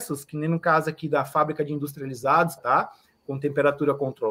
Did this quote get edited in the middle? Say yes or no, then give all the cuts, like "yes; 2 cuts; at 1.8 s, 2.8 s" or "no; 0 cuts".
yes; 1 cut; at 2.6 s